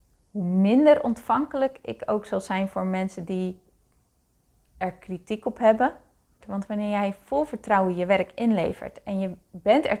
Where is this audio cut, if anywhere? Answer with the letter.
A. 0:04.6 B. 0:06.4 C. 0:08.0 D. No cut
B